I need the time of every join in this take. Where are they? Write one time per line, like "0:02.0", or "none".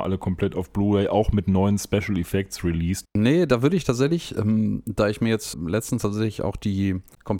0:03.0
0:05.5